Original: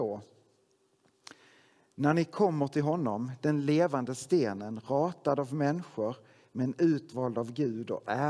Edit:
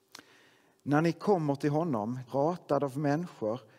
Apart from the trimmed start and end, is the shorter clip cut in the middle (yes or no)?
yes